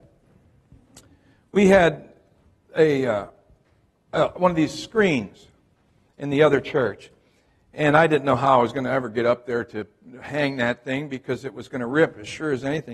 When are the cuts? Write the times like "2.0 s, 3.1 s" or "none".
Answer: none